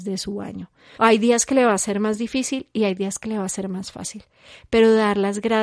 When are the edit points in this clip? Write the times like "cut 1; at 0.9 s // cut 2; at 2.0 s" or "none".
cut 1; at 1.0 s